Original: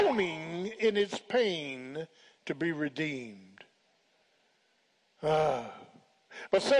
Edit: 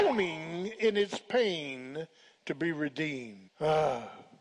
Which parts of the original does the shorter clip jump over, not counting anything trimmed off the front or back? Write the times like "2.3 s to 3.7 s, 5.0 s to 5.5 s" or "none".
3.5 s to 5.1 s